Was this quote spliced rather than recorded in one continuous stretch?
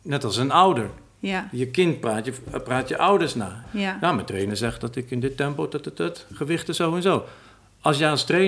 yes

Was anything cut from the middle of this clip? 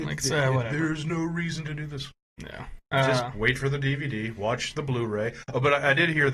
no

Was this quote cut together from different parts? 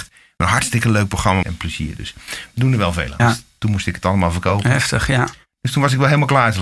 yes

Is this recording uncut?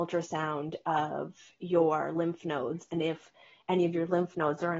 yes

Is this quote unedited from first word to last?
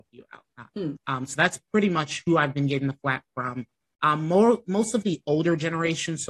no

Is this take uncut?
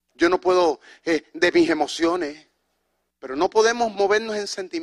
no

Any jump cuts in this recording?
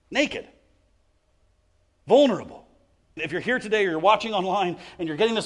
yes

